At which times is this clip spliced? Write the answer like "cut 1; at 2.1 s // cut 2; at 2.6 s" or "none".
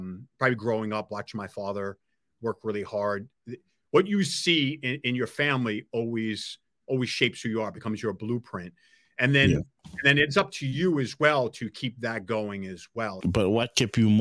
cut 1; at 13.2 s